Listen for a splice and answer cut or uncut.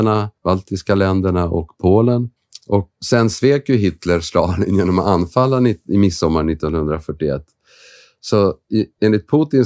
cut